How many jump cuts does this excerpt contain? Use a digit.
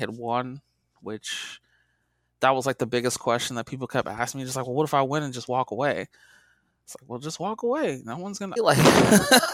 1